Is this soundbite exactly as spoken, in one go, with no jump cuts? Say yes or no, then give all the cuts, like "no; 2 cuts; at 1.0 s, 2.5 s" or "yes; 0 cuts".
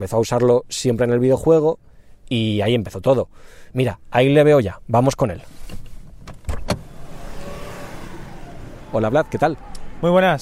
yes; 0 cuts